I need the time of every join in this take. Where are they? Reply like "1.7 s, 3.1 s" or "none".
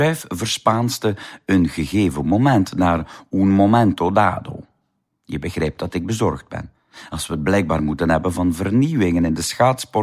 none